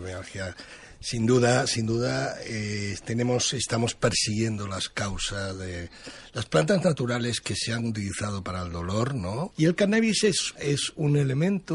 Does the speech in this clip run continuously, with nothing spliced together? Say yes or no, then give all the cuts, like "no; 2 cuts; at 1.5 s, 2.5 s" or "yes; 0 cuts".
no; 2 cuts; at 9.5 s, 10.6 s